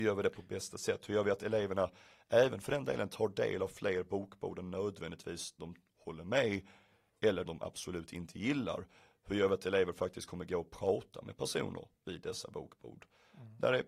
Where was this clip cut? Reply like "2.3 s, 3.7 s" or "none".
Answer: 5.6 s, 7.5 s